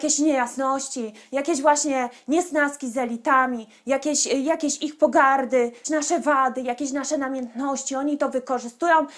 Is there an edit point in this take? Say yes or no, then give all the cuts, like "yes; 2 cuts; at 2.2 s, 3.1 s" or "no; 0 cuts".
no; 0 cuts